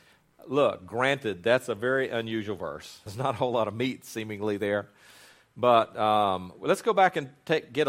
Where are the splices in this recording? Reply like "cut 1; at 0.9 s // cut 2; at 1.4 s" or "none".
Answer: cut 1; at 3.1 s